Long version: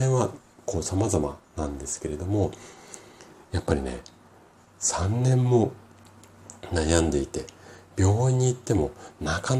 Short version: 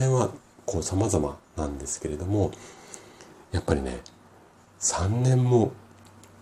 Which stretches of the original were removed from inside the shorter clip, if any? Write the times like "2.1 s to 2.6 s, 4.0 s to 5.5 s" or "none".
none